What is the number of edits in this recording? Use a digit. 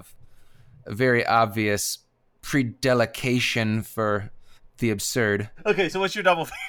0